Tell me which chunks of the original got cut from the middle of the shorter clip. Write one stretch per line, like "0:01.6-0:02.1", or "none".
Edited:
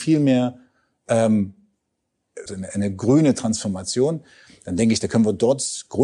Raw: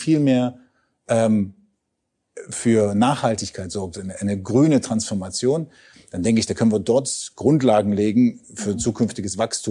0:02.5-0:03.9